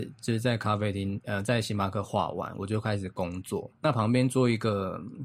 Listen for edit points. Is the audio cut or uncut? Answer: cut